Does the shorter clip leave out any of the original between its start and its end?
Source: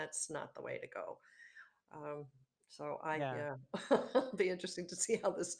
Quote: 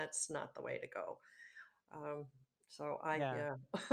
no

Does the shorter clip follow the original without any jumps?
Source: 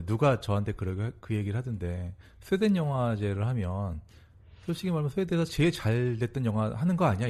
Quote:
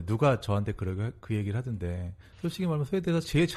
no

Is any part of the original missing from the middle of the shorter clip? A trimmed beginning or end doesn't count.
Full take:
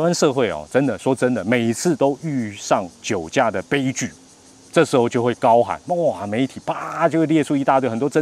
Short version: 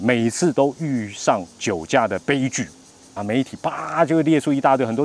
yes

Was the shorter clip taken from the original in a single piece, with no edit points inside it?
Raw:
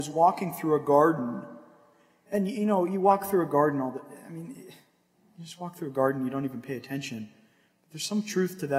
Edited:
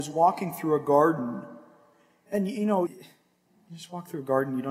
no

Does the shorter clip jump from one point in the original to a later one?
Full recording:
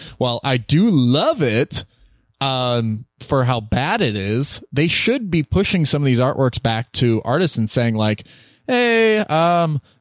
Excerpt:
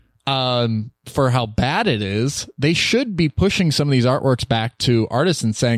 no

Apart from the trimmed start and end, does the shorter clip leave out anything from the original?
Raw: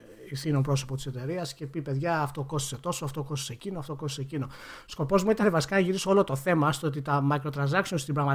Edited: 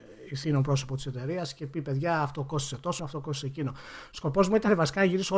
yes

